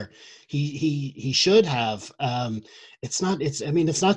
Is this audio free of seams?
yes; 0 cuts

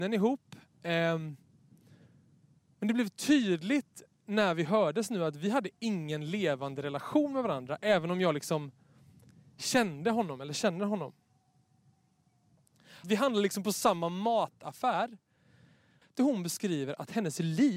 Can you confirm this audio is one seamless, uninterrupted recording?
no; 2 cuts; at 13.0 s, 16.0 s

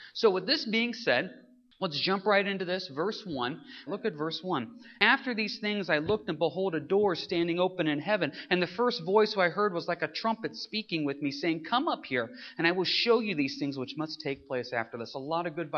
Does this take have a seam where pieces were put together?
yes; 1 cut; at 3.9 s

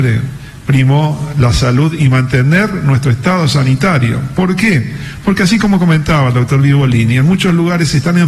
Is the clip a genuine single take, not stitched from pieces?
yes; 0 cuts

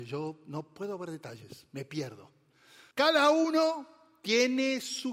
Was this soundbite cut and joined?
yes; 1 cut; at 2.9 s

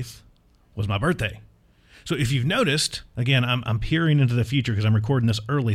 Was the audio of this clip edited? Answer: no; 0 cuts

